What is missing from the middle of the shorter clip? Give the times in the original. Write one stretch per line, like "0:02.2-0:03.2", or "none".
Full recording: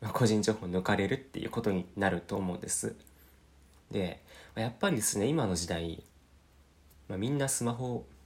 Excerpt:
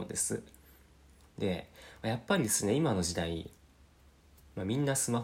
none